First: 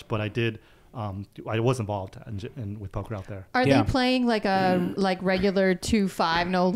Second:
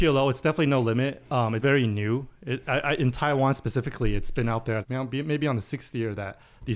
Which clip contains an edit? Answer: second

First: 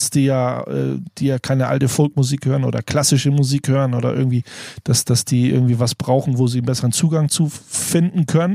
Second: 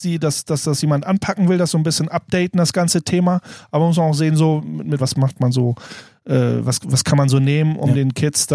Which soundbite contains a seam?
second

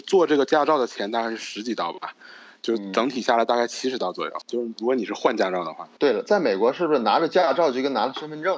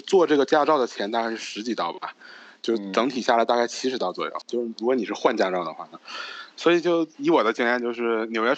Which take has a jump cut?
second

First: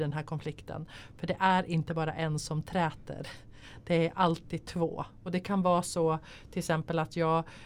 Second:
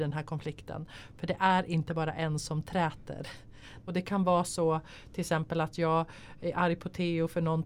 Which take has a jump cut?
second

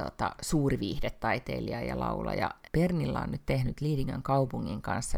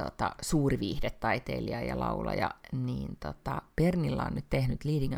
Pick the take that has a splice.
first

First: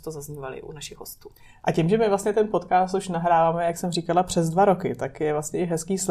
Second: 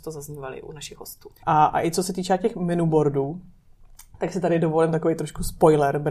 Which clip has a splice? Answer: second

